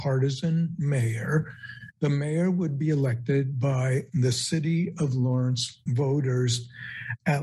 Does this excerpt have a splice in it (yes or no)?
yes